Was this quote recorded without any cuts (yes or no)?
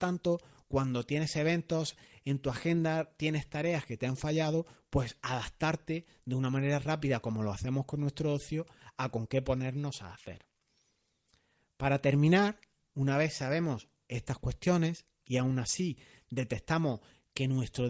yes